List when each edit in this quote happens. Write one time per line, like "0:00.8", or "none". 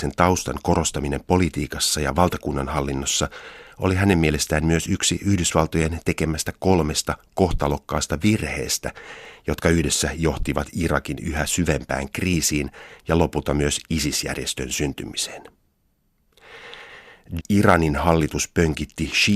0:17.4